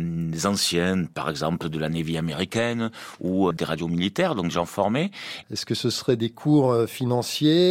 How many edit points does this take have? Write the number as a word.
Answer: two